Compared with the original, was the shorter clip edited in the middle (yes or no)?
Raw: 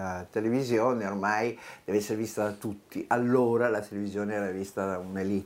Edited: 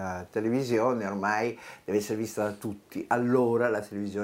no